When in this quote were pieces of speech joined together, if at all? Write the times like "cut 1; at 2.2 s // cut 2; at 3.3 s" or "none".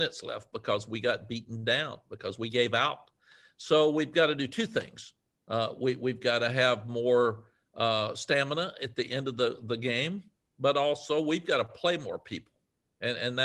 cut 1; at 5.3 s